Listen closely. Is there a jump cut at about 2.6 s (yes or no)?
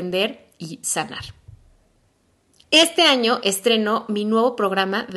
yes